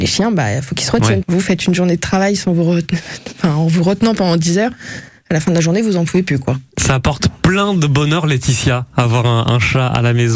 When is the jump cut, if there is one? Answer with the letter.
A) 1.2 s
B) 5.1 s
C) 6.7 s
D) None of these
A